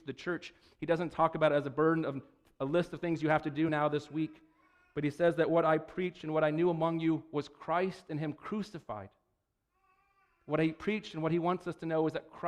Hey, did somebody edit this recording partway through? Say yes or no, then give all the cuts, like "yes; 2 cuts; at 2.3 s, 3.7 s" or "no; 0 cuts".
no; 0 cuts